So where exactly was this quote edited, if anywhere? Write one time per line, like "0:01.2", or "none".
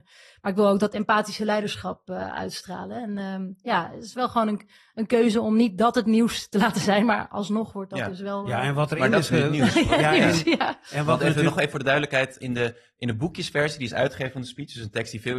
0:12.4